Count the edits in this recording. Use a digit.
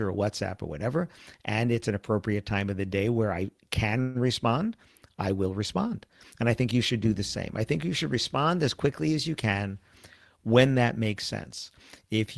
0